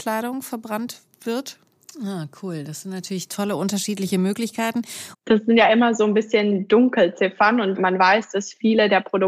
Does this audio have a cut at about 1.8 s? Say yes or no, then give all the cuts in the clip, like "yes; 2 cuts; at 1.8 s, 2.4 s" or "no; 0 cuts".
yes; 2 cuts; at 1.8 s, 5.1 s